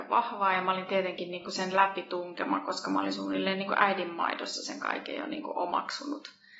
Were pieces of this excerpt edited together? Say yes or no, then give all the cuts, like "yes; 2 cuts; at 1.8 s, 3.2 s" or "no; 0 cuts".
no; 0 cuts